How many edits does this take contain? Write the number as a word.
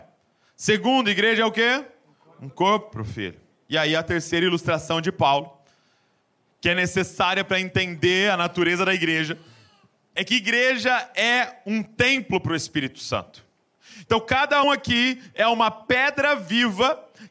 one